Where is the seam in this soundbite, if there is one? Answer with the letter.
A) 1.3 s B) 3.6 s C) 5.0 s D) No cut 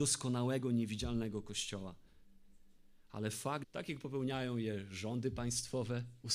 B